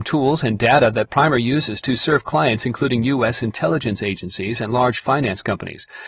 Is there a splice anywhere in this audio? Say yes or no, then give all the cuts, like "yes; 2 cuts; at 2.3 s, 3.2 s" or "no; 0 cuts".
no; 0 cuts